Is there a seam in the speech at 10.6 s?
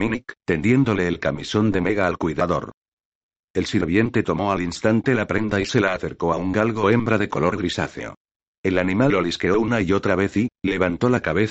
yes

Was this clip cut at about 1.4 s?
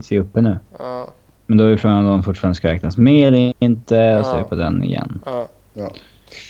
yes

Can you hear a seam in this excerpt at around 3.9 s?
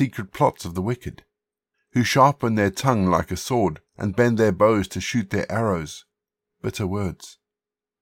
yes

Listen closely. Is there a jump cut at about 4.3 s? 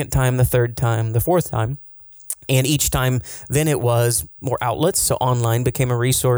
yes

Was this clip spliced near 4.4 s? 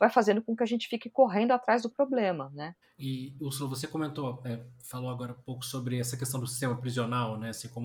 no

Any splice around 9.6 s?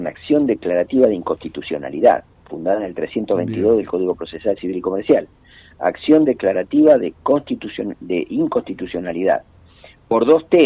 no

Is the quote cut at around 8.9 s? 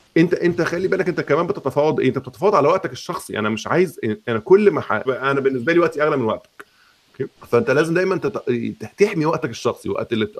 no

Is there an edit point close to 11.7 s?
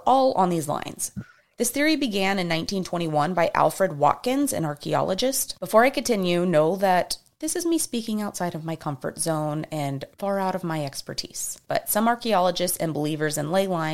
yes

